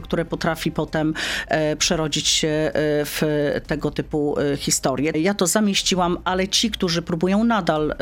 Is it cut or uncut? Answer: cut